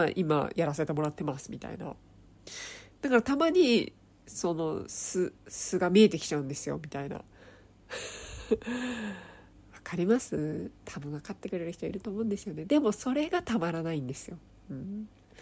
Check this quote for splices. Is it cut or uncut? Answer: uncut